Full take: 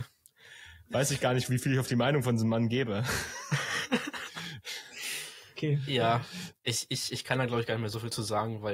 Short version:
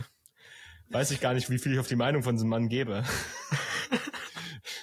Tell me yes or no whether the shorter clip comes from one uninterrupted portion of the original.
yes